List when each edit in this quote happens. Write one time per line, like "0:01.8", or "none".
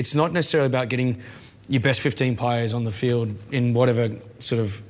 none